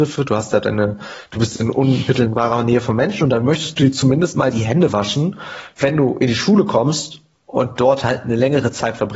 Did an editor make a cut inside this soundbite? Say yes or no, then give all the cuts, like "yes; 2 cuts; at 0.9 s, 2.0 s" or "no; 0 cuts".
no; 0 cuts